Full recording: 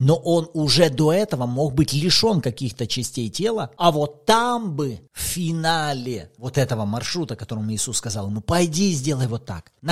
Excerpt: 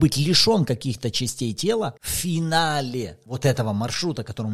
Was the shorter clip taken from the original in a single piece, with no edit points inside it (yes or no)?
no